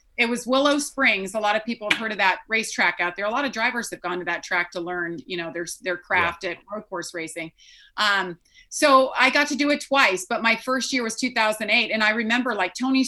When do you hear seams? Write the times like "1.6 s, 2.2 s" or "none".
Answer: none